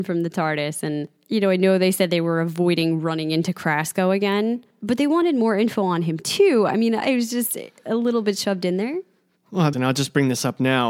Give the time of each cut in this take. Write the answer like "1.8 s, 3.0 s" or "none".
9.7 s

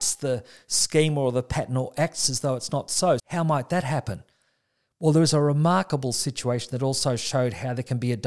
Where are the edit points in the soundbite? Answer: 3.2 s

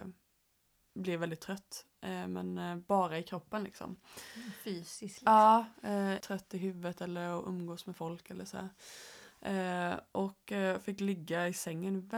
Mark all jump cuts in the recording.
6.2 s

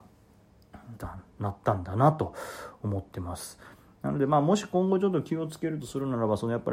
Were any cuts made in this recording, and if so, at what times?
0.9 s

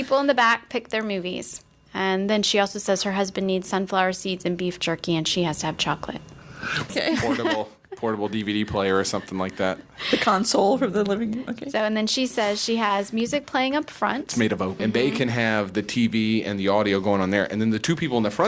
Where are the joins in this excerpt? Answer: 6.9 s, 14.8 s

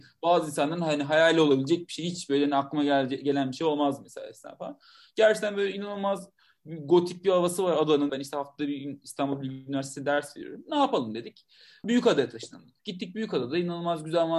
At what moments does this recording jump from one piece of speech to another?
8.1 s, 11.8 s

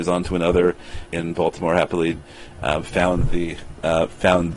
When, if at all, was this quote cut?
1.1 s

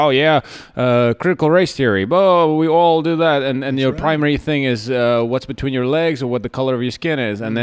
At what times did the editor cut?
none

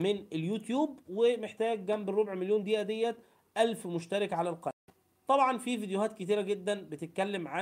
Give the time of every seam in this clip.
none

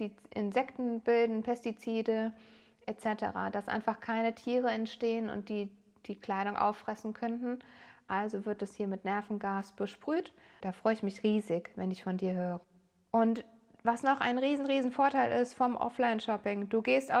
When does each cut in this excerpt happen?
10.6 s

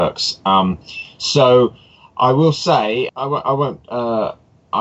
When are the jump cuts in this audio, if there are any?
3.1 s

